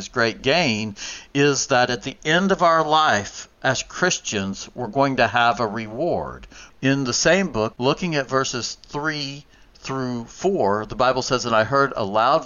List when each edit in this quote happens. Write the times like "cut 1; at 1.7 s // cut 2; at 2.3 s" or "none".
cut 1; at 6.7 s // cut 2; at 7.7 s

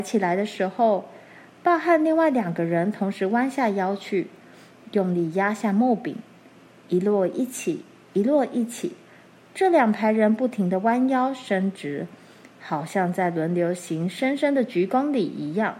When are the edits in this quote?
none

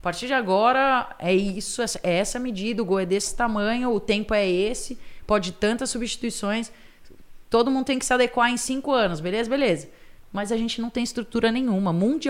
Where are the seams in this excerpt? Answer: none

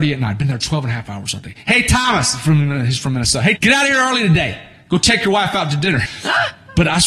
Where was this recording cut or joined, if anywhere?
cut 1; at 3.6 s // cut 2; at 6.0 s

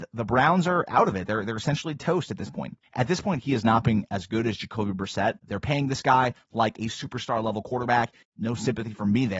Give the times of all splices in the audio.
cut 1; at 2.8 s // cut 2; at 5.4 s // cut 3; at 8.2 s

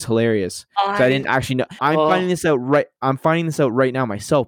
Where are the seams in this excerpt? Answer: cut 1; at 1.8 s

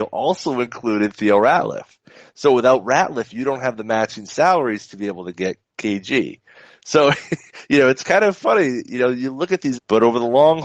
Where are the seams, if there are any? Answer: cut 1; at 9.7 s

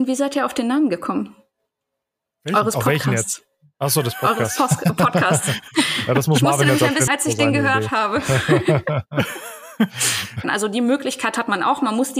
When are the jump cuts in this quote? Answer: cut 1; at 7.1 s // cut 2; at 10.4 s

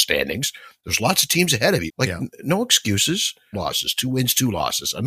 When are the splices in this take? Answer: cut 1; at 1.9 s // cut 2; at 3.5 s

